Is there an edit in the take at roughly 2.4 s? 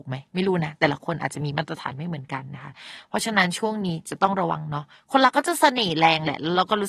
no; 0 cuts

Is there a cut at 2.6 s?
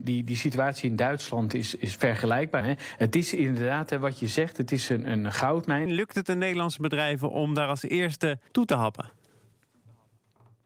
yes; 3 cuts; at 2.6 s, 5.9 s, 8.5 s

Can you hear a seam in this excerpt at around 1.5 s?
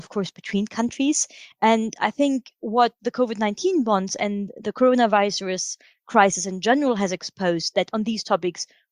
yes; 1 cut; at 1.5 s

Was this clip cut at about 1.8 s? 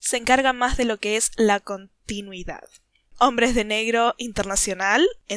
no; 1 cut; at 3.1 s

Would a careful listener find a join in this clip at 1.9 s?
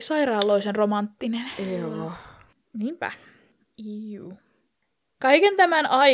no; 0 cuts

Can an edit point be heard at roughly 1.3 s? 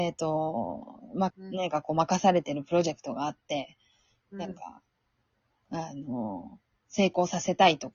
yes; 1 cut; at 1.3 s

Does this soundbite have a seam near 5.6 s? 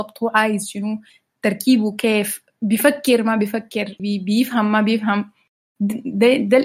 no; 1 cut; at 4.0 s

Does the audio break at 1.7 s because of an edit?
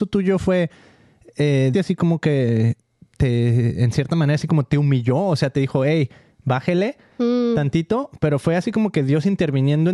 yes; 1 cut; at 1.7 s

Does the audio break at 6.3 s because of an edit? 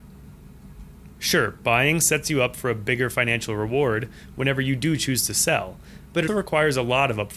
yes; 2 cuts; at 1.1 s, 6.3 s

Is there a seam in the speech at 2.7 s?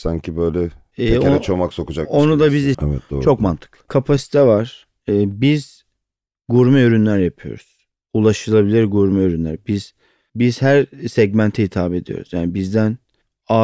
yes; 2 cuts; at 2.7 s, 3.9 s

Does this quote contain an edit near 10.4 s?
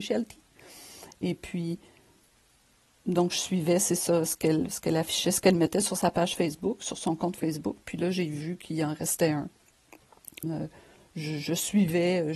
yes; 1 cut; at 10.4 s

